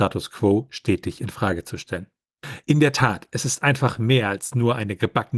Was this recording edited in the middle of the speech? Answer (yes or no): no